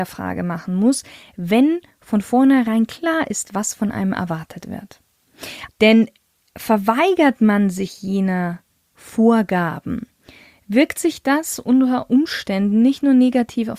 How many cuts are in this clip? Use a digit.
1